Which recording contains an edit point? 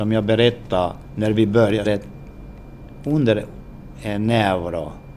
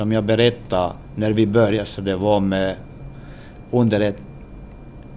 first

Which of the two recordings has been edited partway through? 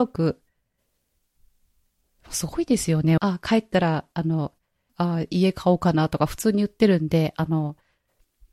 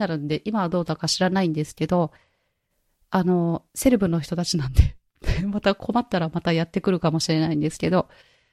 first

